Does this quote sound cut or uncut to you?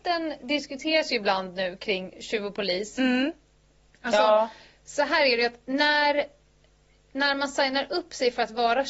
uncut